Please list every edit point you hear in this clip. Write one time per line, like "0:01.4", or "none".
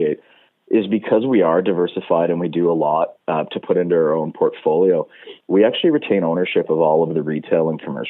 none